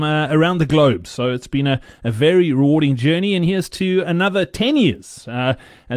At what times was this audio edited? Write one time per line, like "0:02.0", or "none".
none